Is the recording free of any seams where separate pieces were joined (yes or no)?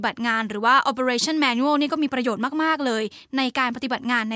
yes